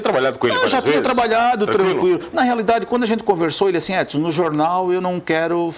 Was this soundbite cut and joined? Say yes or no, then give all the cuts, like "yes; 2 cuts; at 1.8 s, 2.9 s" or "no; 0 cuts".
no; 0 cuts